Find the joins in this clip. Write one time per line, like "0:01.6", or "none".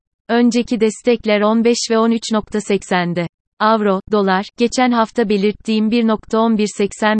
none